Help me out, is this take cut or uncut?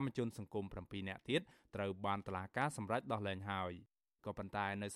uncut